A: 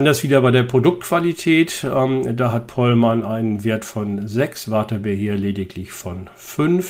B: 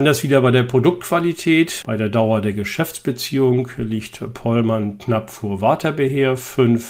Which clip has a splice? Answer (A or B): B